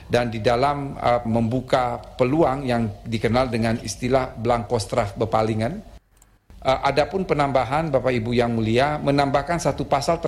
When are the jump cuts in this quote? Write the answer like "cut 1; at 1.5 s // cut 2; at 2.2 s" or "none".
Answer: cut 1; at 1.2 s // cut 2; at 6.1 s